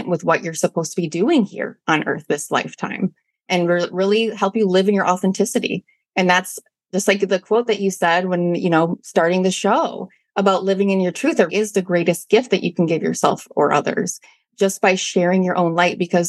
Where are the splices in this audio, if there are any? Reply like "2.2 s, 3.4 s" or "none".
11.5 s